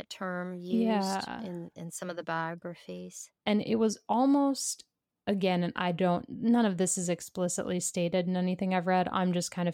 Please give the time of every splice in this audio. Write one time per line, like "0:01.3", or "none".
0:03.4